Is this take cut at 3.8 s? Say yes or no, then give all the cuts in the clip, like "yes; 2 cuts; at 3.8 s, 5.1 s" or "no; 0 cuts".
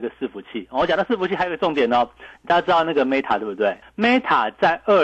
yes; 1 cut; at 3.8 s